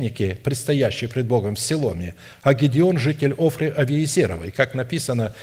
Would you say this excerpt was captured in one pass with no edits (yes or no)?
yes